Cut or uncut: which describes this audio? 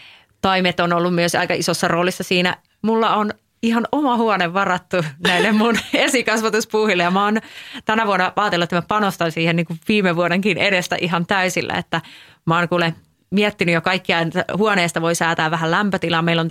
cut